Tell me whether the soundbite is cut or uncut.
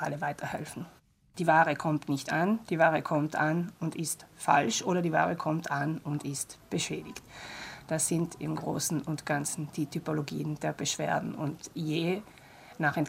cut